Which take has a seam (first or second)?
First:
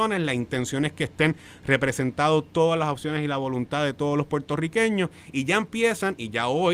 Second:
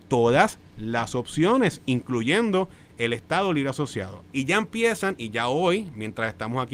second